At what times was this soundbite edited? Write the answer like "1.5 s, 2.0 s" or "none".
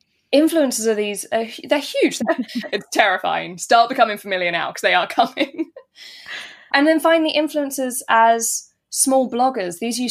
2.2 s, 6.7 s